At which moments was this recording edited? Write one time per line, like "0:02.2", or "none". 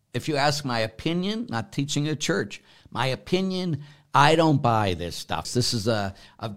0:05.4